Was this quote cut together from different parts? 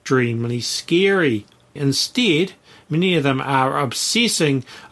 yes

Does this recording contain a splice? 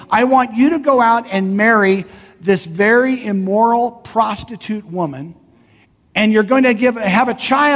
no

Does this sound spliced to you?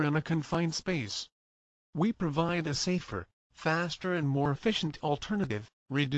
no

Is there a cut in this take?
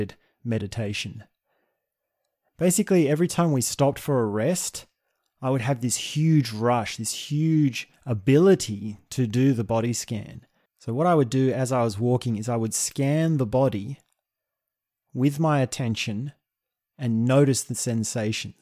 yes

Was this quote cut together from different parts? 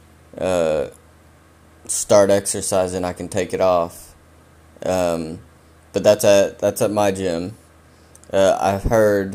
no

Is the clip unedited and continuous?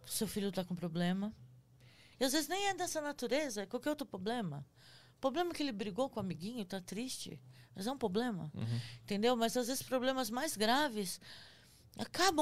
no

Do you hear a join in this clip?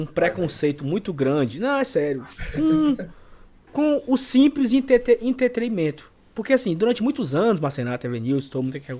no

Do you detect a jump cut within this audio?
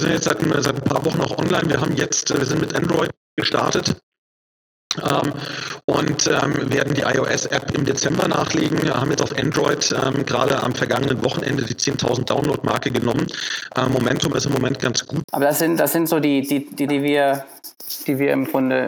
yes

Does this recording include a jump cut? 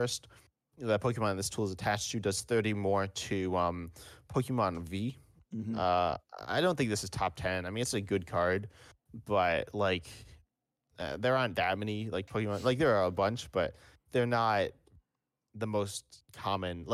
no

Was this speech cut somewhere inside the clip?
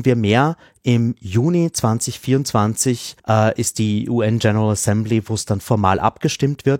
yes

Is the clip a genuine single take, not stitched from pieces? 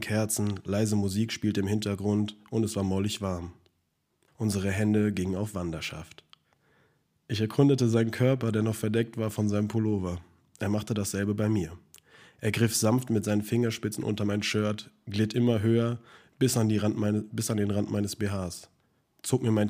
no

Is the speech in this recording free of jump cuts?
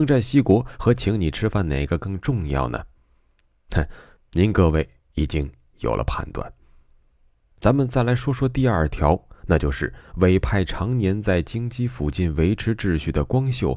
no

